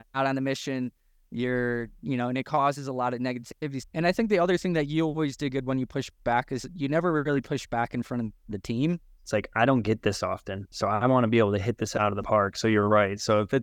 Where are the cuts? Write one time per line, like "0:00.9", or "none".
0:03.8
0:09.2